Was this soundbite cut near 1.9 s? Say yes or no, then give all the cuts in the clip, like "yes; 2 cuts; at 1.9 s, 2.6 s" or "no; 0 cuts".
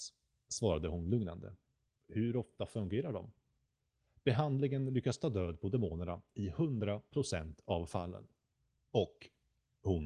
yes; 1 cut; at 1.9 s